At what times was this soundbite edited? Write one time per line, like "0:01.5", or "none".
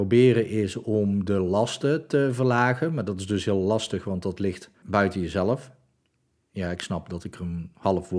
0:04.8